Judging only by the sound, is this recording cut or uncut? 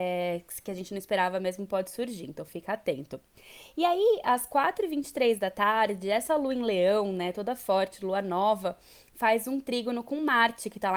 uncut